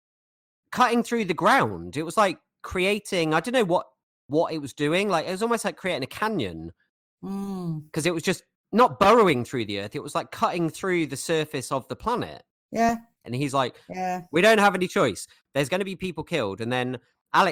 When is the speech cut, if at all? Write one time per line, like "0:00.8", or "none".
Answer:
0:13.2